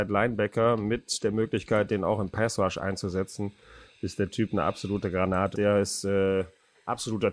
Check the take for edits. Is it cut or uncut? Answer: cut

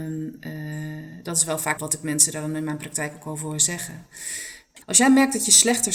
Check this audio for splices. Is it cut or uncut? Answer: cut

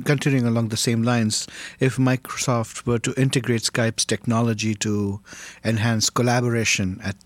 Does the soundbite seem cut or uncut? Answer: uncut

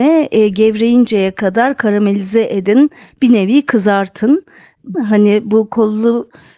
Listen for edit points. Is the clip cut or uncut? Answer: cut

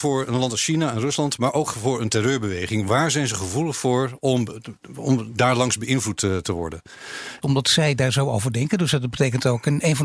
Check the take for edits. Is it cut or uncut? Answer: cut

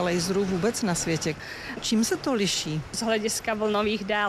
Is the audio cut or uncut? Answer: cut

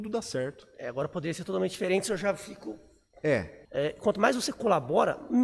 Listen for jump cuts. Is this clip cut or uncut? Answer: cut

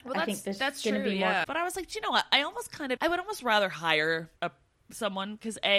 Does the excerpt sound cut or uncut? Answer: cut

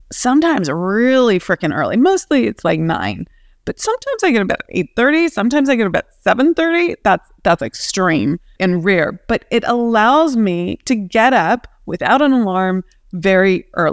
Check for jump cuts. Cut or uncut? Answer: uncut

